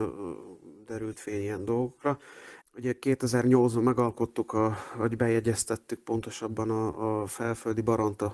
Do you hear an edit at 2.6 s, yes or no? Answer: yes